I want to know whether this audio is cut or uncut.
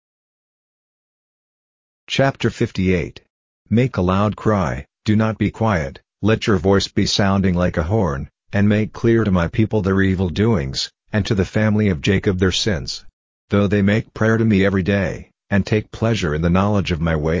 uncut